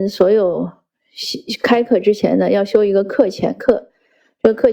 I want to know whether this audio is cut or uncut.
uncut